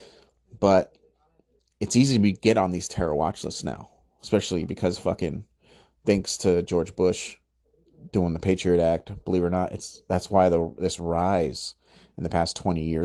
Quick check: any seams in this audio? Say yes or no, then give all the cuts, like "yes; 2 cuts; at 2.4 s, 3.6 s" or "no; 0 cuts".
no; 0 cuts